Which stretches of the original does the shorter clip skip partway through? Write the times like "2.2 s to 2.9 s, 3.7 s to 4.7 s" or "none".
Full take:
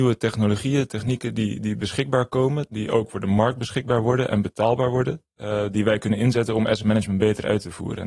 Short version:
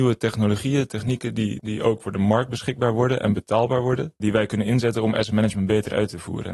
1.6 s to 2.7 s, 5.3 s to 5.7 s